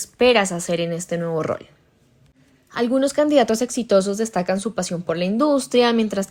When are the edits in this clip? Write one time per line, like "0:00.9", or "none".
none